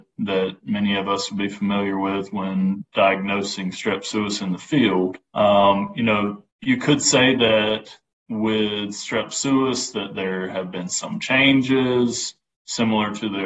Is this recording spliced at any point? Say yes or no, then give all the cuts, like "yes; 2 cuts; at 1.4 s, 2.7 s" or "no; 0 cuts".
yes; 2 cuts; at 5.3 s, 6.5 s